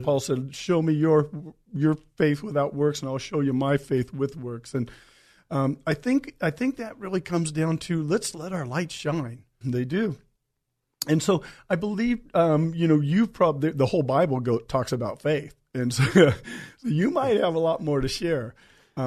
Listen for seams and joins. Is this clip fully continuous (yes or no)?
no